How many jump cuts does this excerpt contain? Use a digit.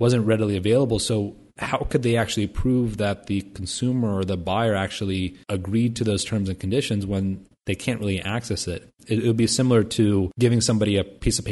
0